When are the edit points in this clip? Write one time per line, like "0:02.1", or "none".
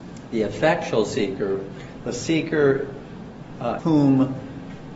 0:03.8